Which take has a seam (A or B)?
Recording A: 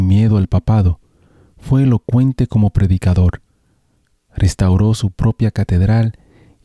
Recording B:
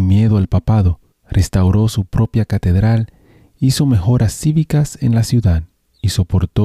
B